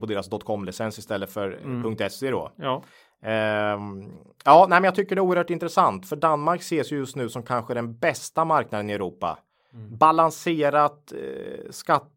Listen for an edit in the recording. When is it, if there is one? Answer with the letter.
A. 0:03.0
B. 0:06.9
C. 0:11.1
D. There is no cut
D